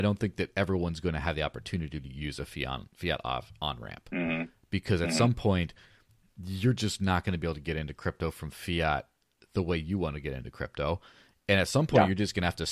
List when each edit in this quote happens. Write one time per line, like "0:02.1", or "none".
none